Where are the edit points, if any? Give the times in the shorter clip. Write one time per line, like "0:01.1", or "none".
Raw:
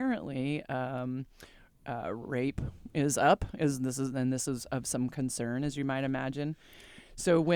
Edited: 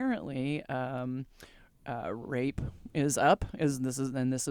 none

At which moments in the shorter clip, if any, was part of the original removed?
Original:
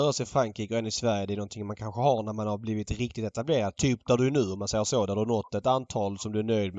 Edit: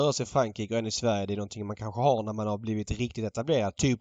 none

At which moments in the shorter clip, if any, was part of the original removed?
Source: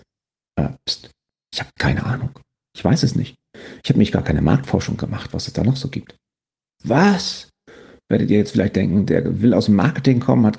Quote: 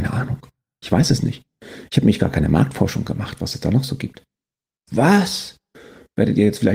none

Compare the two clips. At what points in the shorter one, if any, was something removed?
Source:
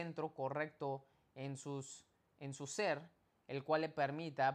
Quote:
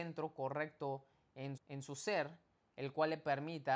0:01.6

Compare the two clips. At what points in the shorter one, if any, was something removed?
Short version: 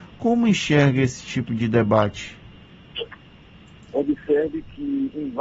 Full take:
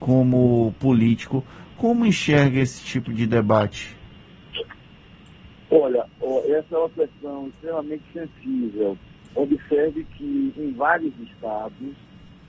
0:03.8

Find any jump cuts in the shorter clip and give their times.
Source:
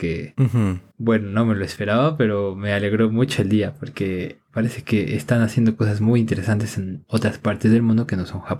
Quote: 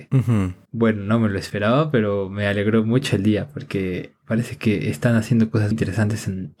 0:05.7

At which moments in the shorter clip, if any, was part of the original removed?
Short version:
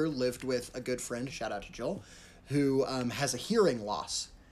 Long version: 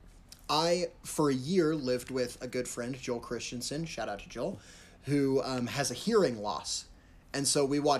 0:01.3

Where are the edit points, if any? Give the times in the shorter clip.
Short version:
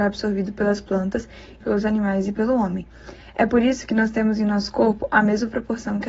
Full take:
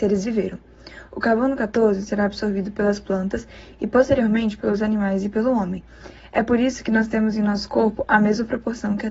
0:01.6

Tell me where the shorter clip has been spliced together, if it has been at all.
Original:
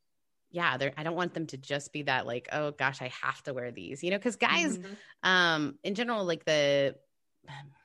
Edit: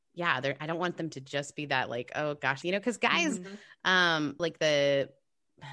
0:02.6
0:04.4

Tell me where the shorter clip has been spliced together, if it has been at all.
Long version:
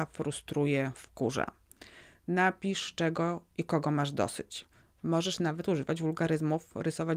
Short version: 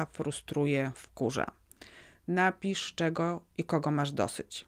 none

